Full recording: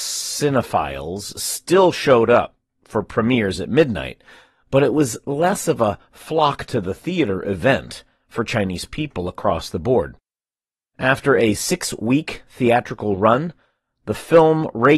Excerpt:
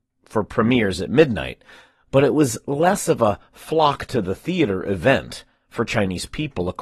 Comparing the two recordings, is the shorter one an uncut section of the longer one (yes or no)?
yes